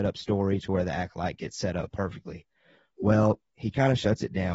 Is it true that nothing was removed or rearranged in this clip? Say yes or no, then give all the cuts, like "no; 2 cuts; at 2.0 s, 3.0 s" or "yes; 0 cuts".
yes; 0 cuts